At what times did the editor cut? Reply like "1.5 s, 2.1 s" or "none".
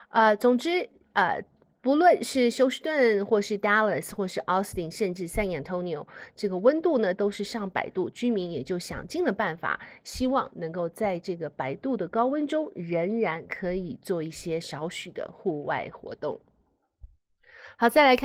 none